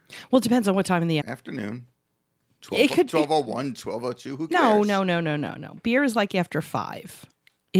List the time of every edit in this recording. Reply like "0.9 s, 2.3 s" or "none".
1.2 s